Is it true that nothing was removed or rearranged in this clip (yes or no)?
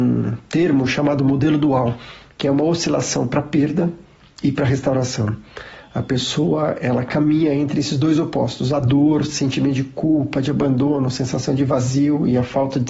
yes